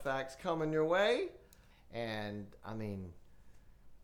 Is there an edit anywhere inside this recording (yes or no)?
yes